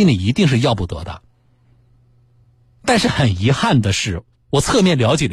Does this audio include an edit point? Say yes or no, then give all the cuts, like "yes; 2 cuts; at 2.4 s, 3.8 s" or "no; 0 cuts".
yes; 1 cut; at 4.3 s